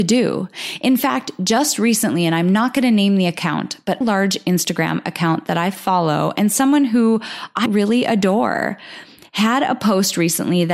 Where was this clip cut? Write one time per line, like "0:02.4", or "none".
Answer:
0:04.0
0:07.7